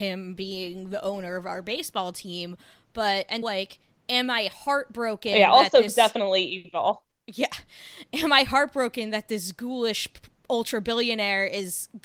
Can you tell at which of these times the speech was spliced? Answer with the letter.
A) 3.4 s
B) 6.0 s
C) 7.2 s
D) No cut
A